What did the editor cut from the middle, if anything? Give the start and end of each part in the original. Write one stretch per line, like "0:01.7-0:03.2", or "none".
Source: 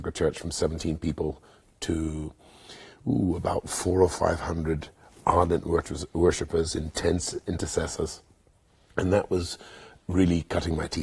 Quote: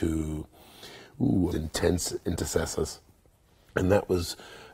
0:03.4-0:06.7